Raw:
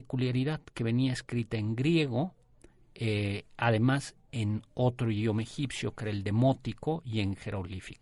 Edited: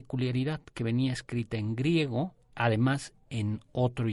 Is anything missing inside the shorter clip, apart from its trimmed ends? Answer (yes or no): yes